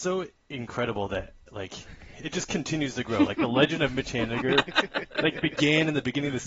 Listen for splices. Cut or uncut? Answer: uncut